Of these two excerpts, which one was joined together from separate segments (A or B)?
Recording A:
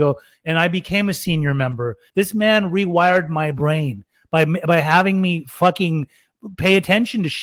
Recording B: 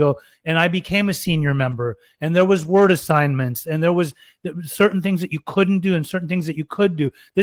A